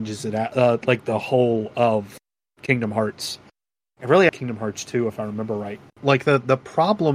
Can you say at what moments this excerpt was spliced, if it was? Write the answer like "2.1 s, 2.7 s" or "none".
4.3 s, 5.9 s